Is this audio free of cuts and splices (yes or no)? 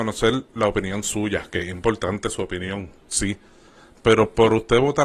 yes